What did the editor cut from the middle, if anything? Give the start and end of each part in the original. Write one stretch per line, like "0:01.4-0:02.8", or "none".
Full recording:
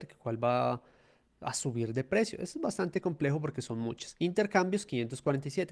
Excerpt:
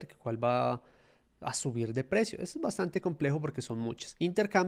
none